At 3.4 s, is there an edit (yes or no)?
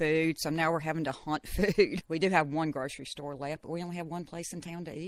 no